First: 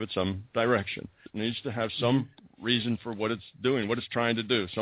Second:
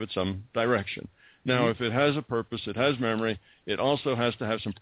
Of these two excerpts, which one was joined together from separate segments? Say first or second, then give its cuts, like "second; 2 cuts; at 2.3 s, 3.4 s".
first; 1 cut; at 1.3 s